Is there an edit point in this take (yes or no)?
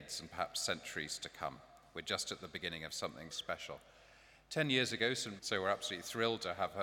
yes